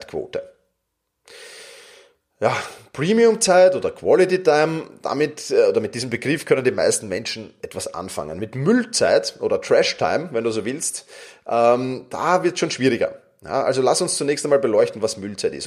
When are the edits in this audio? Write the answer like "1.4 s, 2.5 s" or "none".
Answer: none

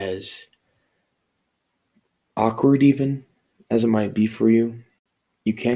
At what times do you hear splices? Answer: none

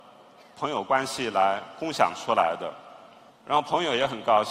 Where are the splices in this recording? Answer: 3.3 s

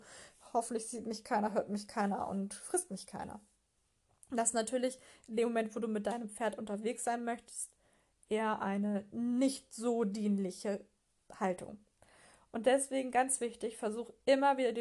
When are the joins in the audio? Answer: none

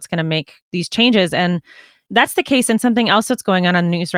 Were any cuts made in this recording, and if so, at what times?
none

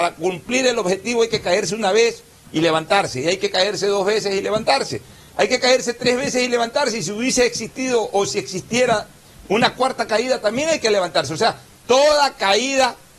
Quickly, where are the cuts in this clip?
none

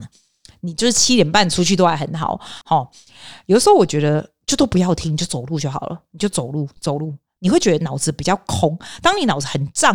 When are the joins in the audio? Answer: 2.6 s

